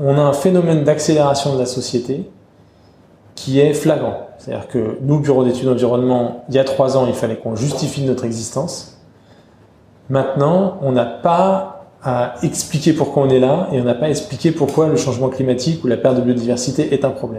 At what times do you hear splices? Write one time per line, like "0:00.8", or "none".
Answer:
none